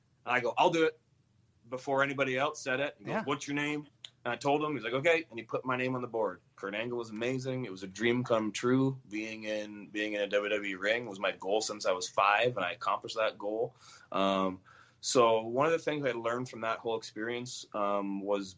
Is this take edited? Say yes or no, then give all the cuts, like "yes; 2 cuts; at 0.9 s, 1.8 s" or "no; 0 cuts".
yes; 1 cut; at 6.5 s